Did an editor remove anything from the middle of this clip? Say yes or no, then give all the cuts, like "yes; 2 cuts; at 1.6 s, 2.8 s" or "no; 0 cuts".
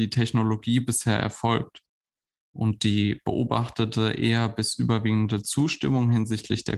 no; 0 cuts